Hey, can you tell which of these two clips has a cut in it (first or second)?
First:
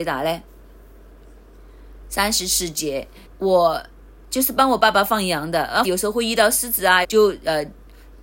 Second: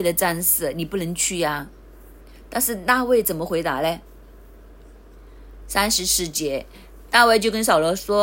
first